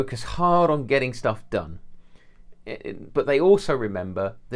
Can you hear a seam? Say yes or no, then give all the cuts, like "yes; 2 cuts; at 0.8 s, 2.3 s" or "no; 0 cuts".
yes; 1 cut; at 3.1 s